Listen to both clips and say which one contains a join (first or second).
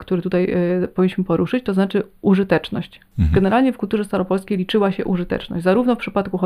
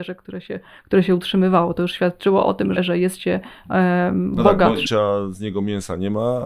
second